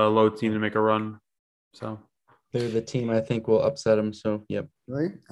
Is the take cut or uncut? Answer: uncut